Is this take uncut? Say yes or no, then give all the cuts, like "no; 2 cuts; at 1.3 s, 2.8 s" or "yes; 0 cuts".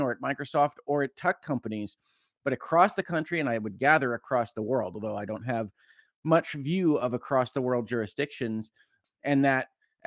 no; 1 cut; at 9.0 s